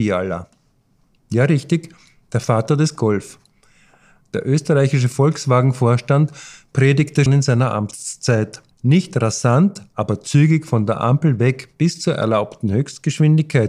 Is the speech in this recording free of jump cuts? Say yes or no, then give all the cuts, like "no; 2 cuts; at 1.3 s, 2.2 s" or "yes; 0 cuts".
no; 2 cuts; at 7.3 s, 8.7 s